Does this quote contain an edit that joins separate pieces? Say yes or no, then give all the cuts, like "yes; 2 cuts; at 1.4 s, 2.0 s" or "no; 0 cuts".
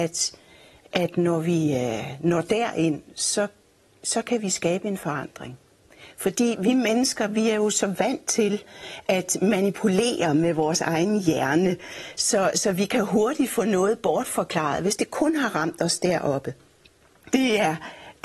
yes; 1 cut; at 17.3 s